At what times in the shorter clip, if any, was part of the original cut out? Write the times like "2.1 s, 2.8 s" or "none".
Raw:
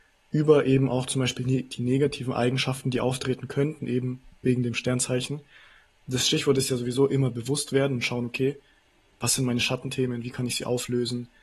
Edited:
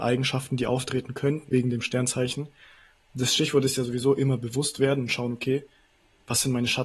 1.5 s